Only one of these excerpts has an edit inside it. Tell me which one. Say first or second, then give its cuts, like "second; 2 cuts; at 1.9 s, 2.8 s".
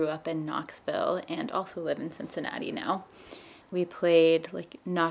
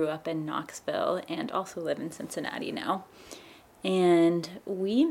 first; 1 cut; at 3.6 s